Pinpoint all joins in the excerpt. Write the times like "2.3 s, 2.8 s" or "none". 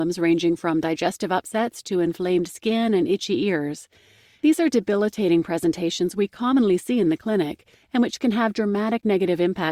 none